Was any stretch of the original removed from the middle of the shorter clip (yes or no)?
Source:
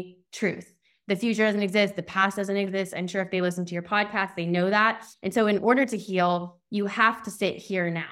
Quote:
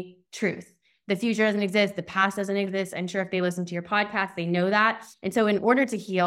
no